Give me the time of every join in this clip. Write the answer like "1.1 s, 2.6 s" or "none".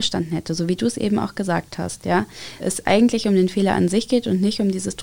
2.6 s